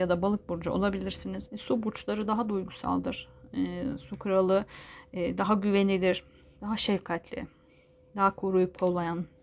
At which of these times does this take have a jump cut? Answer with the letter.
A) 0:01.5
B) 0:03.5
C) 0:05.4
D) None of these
A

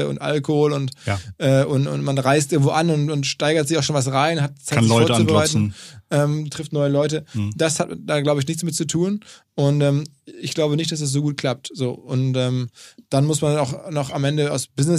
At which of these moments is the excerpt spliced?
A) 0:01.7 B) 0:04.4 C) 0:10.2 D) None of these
D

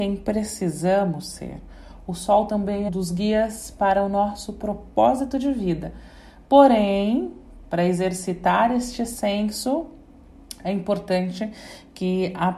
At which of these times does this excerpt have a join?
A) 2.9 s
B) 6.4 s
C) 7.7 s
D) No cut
A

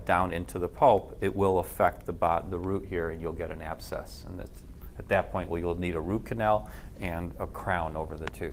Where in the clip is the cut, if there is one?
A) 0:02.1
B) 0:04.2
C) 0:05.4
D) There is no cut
D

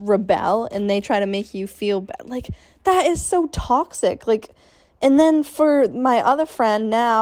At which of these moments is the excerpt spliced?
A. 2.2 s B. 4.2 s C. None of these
C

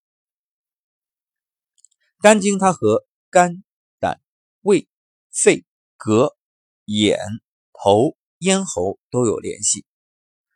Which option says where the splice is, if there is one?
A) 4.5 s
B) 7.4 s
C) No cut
C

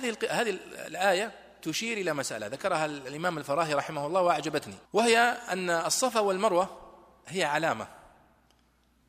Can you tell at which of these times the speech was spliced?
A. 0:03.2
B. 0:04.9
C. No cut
B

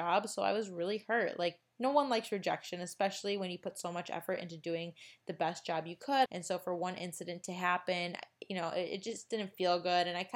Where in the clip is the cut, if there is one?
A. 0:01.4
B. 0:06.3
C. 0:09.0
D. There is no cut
B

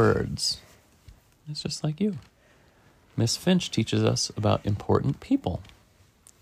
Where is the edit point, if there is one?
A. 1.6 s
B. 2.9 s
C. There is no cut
C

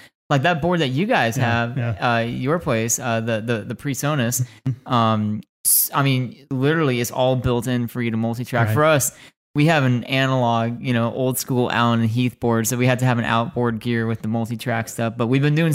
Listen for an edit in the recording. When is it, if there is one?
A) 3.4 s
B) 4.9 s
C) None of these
C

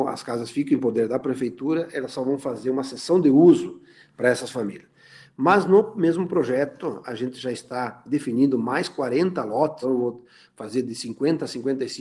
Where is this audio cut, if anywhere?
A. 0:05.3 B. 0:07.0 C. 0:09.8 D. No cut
C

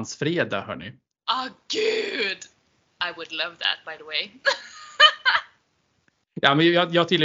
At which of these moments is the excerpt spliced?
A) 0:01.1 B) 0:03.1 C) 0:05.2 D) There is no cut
D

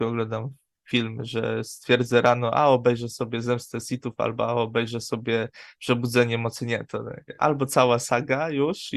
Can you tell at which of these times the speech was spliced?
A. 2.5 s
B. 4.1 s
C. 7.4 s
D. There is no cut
D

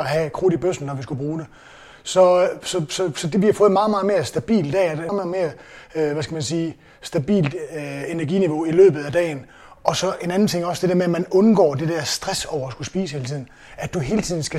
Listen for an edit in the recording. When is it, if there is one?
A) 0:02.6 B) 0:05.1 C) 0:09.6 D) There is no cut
B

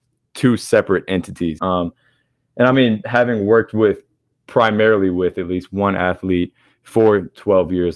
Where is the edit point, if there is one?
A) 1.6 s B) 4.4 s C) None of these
A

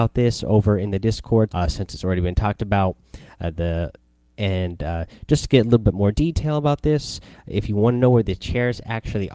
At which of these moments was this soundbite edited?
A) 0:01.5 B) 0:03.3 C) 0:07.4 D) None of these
A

